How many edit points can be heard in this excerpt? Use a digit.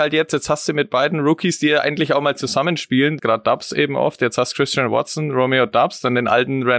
1